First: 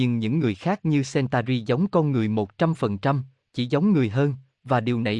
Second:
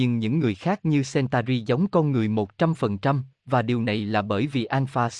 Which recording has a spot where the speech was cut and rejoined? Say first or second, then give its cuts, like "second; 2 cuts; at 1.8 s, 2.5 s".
second; 1 cut; at 3.3 s